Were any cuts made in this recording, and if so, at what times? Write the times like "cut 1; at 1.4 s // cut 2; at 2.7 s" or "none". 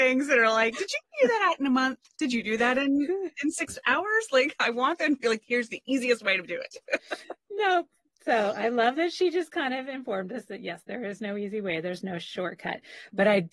none

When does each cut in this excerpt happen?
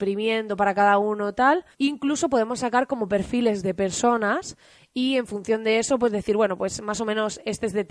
cut 1; at 1.7 s

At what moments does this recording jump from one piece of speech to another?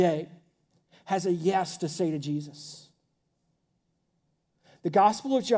none

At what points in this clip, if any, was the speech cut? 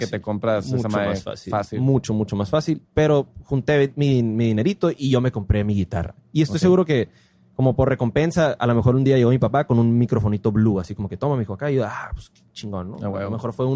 none

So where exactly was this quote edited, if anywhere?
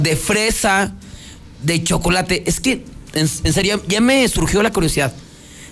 cut 1; at 1.5 s

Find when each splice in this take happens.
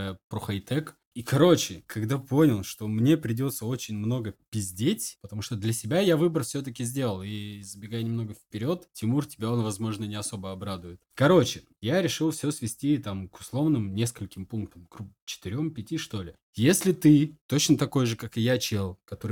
cut 1; at 16.4 s

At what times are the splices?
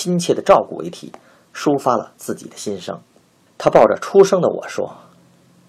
cut 1; at 3.5 s

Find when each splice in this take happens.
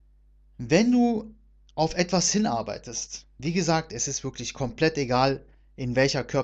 none

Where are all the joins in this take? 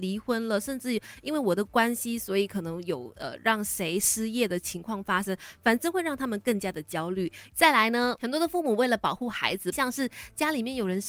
cut 1; at 7.5 s // cut 2; at 9.7 s

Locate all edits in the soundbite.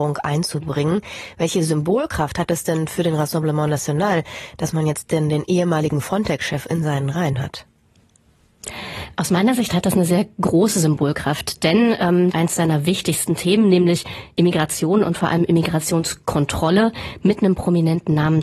cut 1; at 12.3 s

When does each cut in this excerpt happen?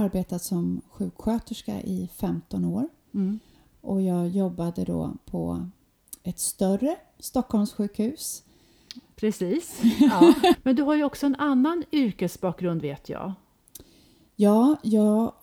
cut 1; at 10.5 s

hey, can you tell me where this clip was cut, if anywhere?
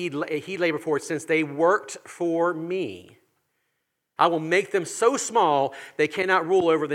cut 1; at 4.2 s

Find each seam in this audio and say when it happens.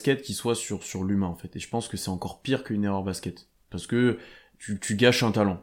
none

